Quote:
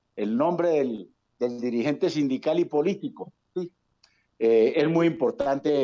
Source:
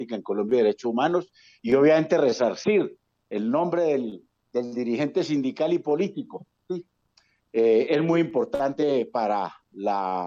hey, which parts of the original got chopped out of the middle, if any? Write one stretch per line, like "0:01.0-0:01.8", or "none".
none